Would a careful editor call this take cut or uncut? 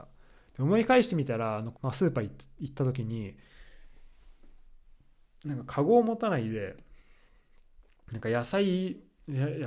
cut